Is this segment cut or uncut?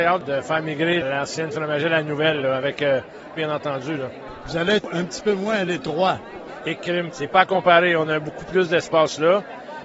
cut